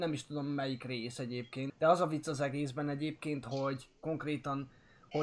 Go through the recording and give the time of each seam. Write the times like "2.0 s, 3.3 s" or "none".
1.7 s

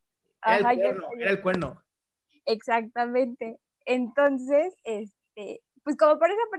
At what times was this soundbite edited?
none

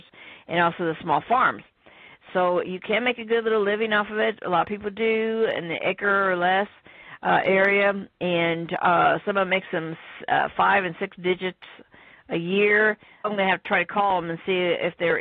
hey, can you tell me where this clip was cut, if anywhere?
13.2 s

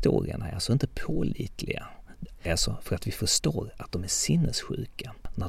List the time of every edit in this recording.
2.4 s

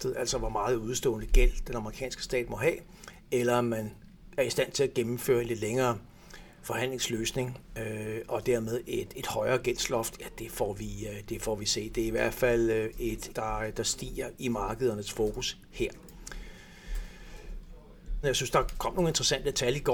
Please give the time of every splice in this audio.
13.3 s, 18.2 s

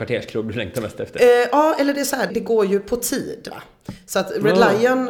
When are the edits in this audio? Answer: 2.3 s

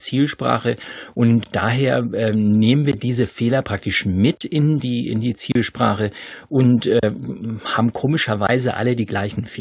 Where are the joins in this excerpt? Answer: 4.8 s

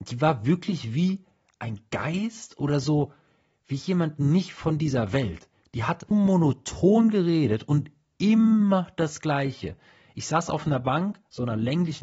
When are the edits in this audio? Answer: 6.1 s

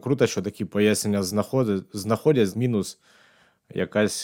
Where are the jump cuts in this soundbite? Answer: 2.5 s

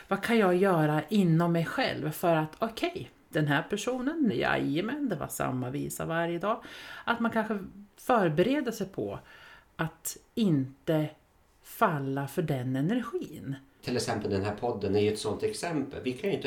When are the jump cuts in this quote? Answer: 4.3 s, 13.8 s

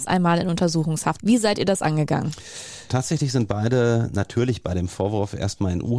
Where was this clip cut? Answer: 1.2 s

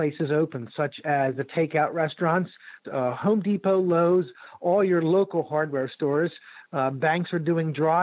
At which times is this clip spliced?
2.8 s

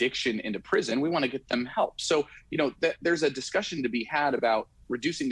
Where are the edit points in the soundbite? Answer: none

